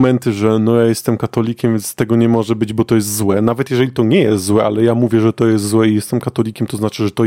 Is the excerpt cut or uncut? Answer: uncut